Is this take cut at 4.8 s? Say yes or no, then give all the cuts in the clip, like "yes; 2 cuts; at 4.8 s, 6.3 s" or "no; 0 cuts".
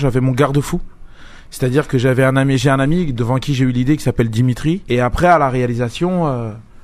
yes; 1 cut; at 4.8 s